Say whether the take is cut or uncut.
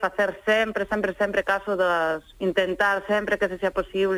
cut